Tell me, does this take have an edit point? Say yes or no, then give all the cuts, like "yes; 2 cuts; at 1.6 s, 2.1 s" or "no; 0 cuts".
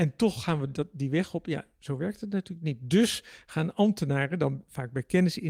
no; 0 cuts